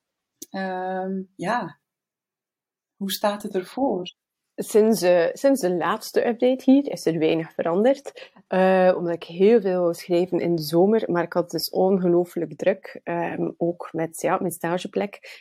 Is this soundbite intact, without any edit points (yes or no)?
yes